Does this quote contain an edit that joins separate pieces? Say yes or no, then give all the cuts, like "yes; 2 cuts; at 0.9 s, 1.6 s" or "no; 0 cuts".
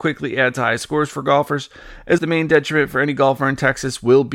yes; 1 cut; at 2.2 s